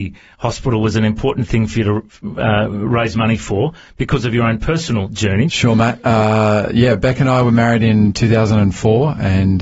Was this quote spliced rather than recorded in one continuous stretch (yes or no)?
yes